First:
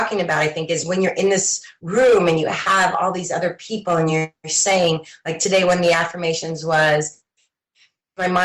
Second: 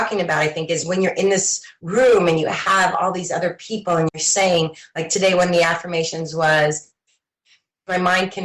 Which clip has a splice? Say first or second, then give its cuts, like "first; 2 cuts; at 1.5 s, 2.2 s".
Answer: second; 1 cut; at 4.1 s